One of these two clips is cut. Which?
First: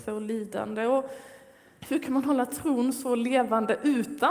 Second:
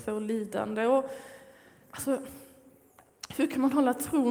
first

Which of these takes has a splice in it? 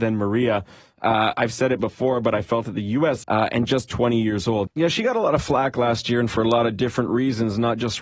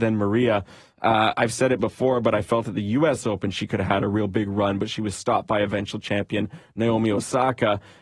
first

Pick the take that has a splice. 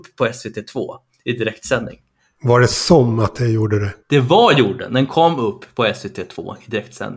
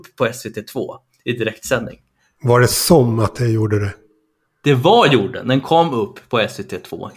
first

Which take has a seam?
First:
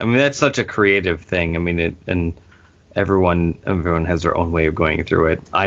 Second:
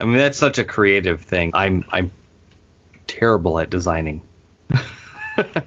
second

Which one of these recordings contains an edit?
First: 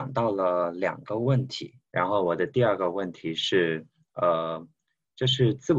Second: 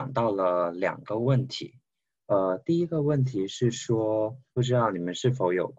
first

